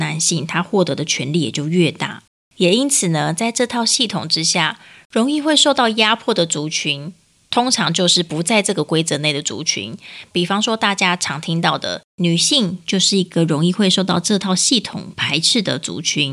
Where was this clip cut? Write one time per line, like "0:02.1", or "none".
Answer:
none